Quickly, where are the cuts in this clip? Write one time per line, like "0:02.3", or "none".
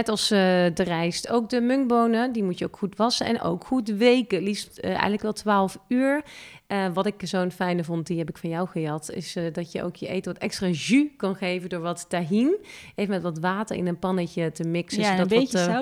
none